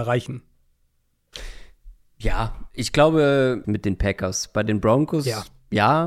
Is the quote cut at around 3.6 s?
yes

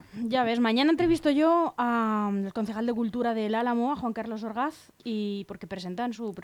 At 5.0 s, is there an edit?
yes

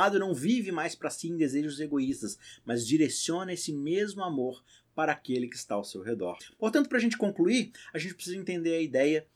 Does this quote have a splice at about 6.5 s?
no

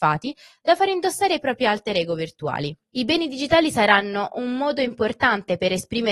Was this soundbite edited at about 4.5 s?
no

